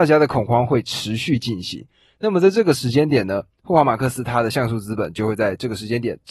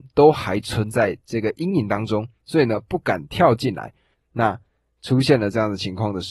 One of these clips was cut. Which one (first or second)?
second